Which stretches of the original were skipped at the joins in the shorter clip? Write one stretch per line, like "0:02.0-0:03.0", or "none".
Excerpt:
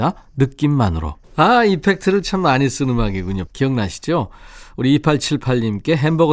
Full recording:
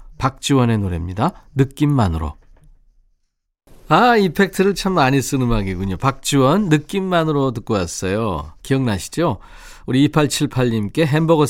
0:02.4-0:03.8
0:06.0-0:08.6